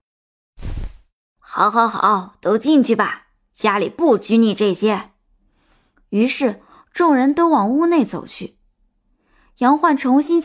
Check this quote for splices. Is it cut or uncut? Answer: uncut